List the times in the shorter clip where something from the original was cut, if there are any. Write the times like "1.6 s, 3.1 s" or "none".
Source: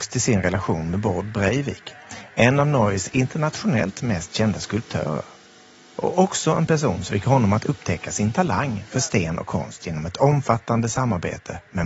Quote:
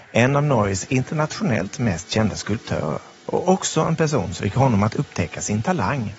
3.2 s